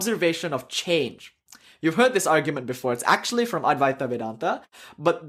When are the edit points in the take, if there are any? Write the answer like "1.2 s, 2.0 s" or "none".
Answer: none

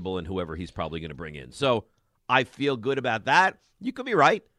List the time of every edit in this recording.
none

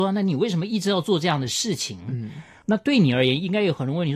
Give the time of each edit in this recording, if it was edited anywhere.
none

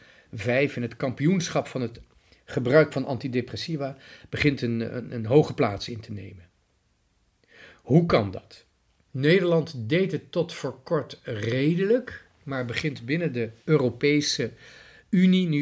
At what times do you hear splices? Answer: 9.1 s, 13.6 s

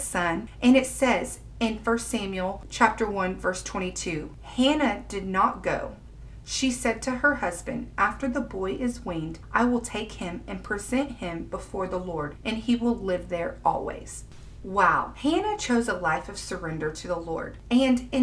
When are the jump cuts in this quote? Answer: none

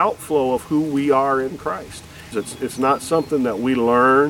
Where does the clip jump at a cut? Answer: 2.3 s

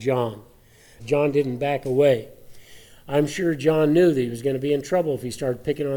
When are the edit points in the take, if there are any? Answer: 1.0 s

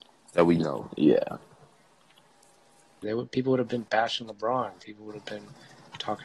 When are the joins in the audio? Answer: 3.0 s

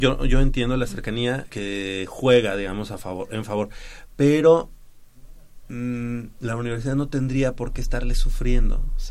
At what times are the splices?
1.5 s

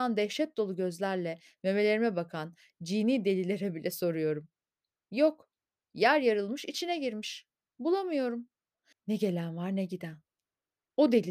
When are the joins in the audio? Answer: 8.9 s

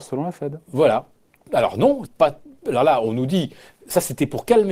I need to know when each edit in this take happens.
2.1 s

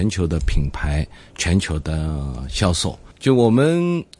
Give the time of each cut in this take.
3.1 s

